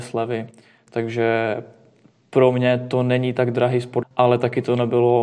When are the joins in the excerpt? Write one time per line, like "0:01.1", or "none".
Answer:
0:04.0